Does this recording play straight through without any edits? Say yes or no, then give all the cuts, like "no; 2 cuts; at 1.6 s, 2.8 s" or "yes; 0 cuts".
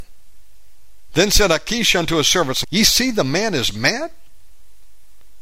no; 2 cuts; at 1.1 s, 2.6 s